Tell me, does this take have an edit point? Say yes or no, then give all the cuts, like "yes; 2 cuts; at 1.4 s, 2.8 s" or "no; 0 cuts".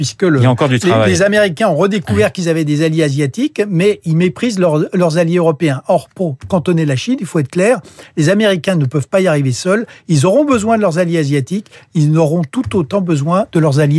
no; 0 cuts